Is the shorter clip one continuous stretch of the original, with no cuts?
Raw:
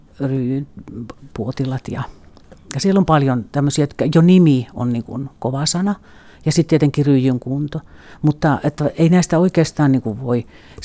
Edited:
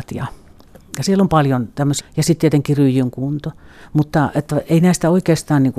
no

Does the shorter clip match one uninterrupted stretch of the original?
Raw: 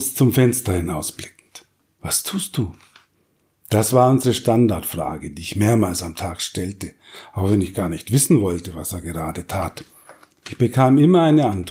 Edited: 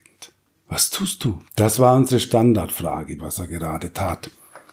no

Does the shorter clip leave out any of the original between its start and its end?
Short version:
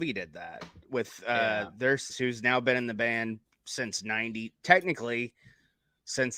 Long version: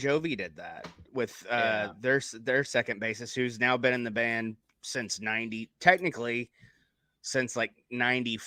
yes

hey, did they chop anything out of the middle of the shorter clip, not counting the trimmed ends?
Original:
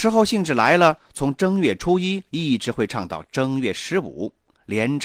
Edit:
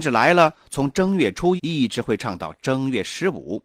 yes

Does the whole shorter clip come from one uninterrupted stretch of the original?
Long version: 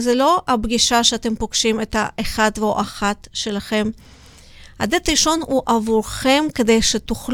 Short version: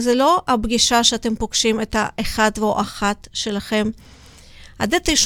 yes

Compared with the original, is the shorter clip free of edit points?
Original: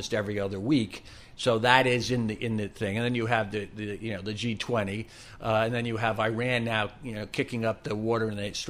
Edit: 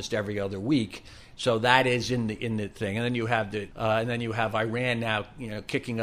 no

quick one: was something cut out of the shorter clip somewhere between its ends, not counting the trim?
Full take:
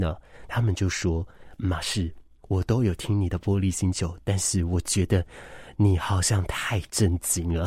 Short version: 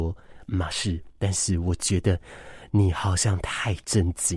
yes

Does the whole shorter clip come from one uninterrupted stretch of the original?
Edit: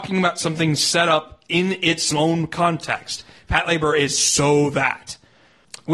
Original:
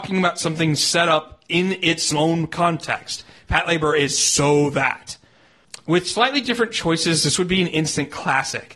yes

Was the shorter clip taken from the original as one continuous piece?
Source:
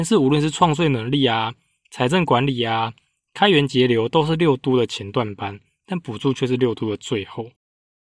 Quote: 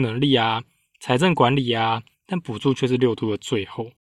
no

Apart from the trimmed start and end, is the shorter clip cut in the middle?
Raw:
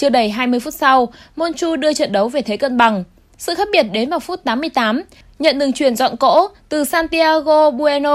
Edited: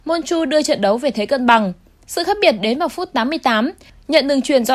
no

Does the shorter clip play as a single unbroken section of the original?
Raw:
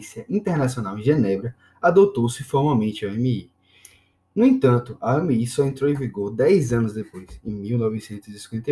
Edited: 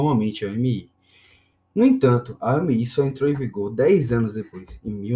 yes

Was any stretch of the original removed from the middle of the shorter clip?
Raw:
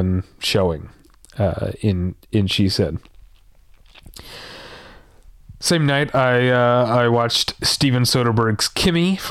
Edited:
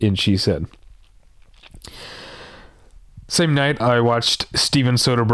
yes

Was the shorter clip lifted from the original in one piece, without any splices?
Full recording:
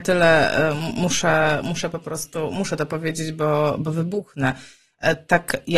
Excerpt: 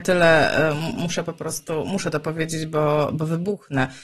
no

